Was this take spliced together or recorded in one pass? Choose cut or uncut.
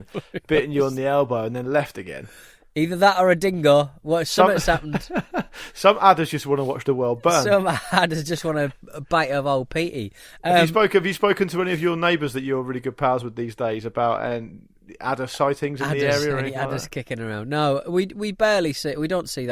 uncut